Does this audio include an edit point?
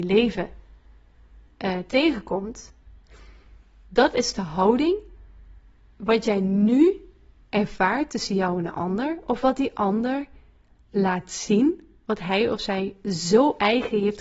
no; 0 cuts

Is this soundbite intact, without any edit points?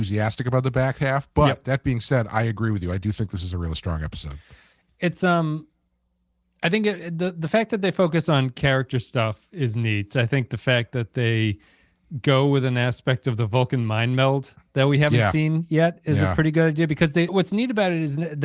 no; 1 cut; at 17.3 s

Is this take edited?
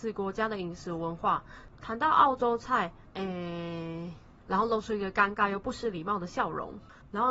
yes; 1 cut; at 3.1 s

